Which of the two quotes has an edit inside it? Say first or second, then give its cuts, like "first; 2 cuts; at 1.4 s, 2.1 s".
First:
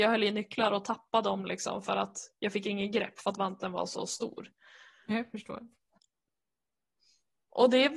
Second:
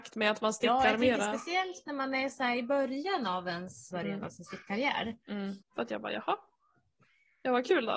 second; 2 cuts; at 3.9 s, 5.6 s